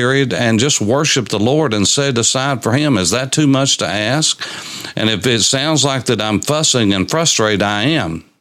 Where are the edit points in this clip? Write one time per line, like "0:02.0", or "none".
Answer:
none